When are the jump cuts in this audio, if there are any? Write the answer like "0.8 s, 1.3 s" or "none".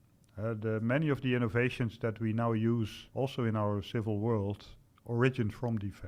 3.1 s

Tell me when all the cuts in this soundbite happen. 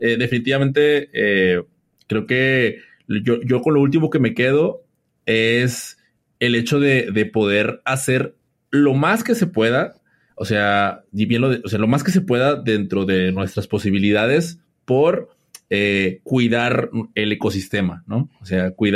none

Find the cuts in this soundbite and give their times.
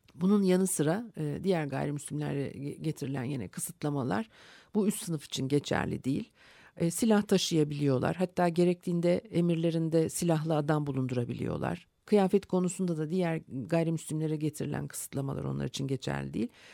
none

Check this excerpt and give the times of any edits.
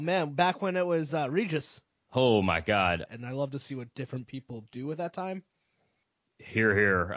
3.1 s

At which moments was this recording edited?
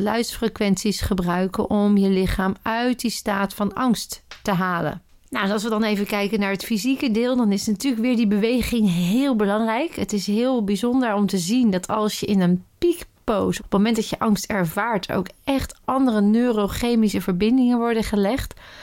13.6 s

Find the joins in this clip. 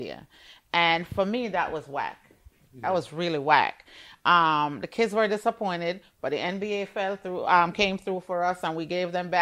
none

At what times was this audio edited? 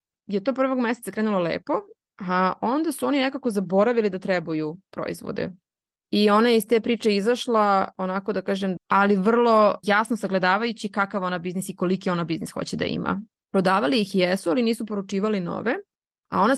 5.9 s, 8.8 s, 13.3 s

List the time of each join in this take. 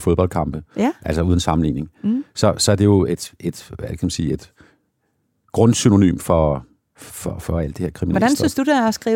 none

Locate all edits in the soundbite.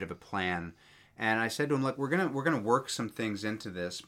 none

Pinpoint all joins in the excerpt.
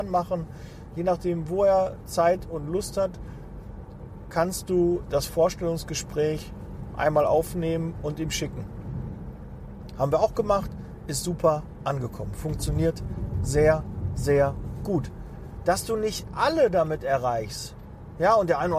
none

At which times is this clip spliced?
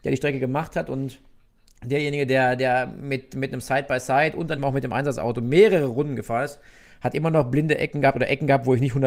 4.6 s

